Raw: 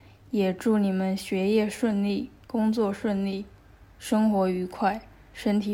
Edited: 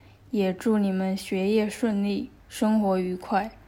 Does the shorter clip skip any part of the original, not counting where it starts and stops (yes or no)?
yes